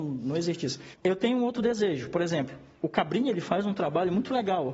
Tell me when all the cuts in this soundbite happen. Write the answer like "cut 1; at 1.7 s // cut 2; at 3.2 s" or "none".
cut 1; at 0.9 s